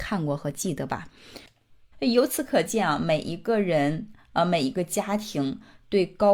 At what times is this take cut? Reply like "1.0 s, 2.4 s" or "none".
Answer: 1.9 s